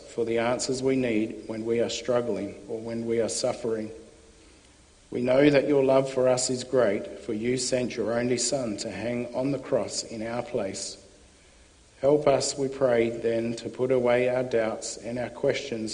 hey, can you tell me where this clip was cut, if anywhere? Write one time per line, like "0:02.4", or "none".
none